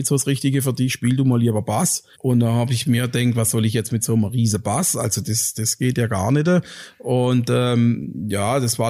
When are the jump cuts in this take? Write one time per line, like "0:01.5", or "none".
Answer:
0:02.1